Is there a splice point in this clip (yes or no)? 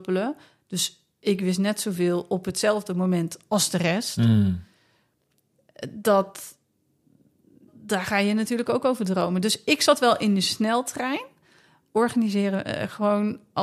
yes